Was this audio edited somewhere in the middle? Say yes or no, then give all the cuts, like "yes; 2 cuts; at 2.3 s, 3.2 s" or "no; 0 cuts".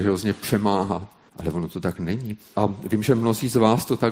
yes; 2 cuts; at 1.3 s, 2.5 s